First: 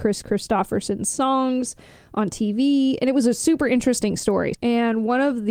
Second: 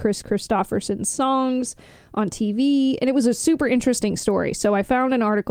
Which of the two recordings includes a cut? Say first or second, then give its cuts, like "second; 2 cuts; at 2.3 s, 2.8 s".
first; 1 cut; at 4.5 s